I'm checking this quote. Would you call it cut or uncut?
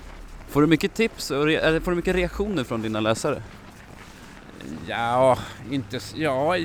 cut